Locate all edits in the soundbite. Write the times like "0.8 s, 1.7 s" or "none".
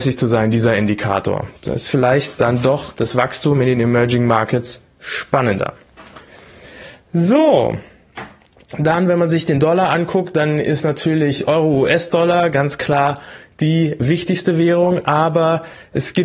none